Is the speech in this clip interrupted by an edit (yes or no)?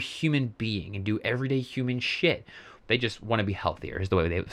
yes